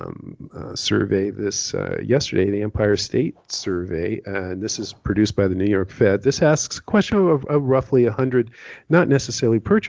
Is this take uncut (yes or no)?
yes